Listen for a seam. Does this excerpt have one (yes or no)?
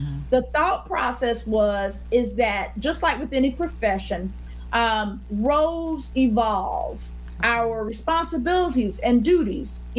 no